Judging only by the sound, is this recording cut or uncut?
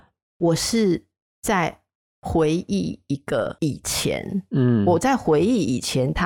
uncut